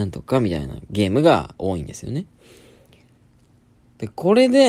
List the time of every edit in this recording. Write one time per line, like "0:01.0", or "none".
none

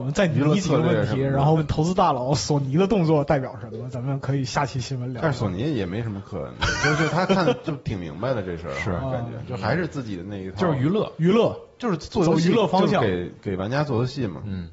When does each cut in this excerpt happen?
0:01.6

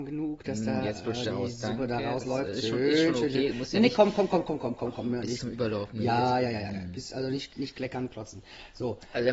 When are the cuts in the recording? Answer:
0:04.6

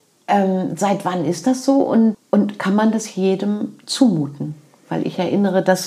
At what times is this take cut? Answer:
0:02.1

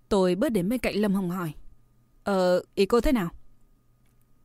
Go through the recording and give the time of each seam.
0:02.7

